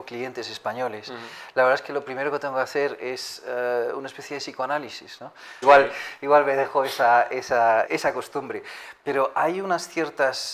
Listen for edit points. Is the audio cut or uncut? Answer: cut